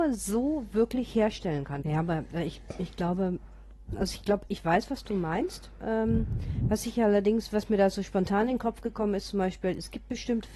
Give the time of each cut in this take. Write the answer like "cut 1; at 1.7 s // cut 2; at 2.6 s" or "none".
cut 1; at 1.8 s